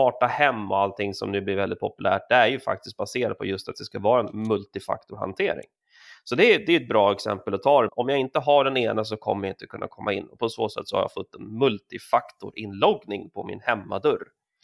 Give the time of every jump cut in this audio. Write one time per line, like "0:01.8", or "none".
0:07.9